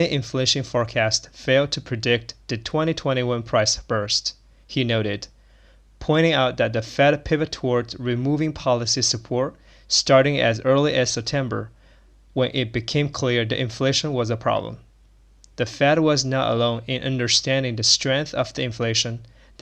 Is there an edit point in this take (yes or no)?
no